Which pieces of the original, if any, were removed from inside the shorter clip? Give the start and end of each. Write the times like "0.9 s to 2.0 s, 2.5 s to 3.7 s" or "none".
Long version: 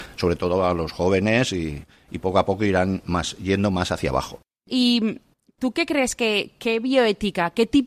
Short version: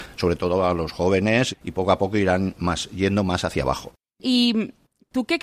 1.5 s to 2.0 s